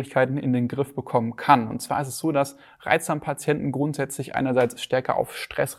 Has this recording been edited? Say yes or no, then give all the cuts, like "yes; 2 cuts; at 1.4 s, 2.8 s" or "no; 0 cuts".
yes; 1 cut; at 1.7 s